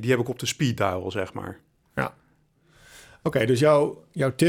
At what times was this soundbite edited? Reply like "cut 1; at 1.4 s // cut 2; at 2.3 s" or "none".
none